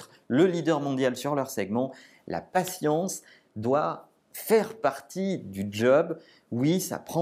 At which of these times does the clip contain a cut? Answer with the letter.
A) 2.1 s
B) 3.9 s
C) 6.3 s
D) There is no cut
D